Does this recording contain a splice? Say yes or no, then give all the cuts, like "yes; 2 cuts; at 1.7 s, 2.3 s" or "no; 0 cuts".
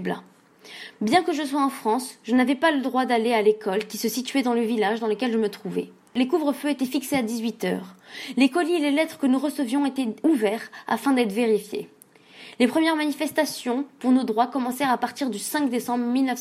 no; 0 cuts